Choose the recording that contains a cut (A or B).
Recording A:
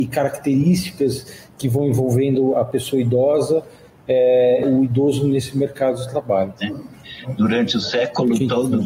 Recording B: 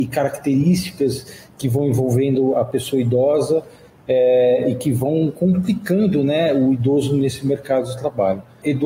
A